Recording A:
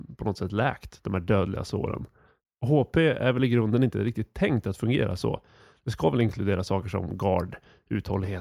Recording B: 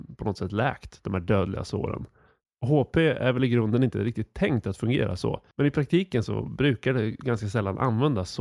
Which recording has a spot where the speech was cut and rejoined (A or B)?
B